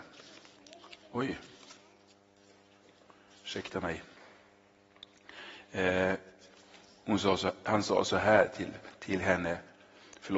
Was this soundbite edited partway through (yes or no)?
no